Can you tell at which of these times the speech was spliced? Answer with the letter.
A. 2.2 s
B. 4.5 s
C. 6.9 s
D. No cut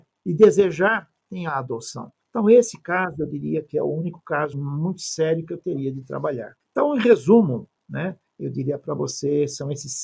B